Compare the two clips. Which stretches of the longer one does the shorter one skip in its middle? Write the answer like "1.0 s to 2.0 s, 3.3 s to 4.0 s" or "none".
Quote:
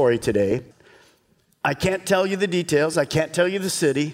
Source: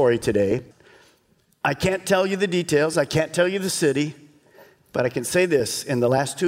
none